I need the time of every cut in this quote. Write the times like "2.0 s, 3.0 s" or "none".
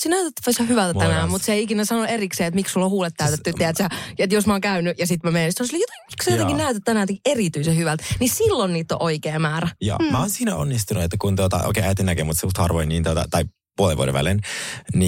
none